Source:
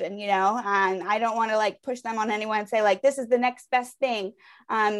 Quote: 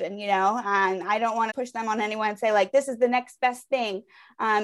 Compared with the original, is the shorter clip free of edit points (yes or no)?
no